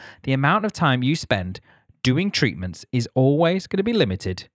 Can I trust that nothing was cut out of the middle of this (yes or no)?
yes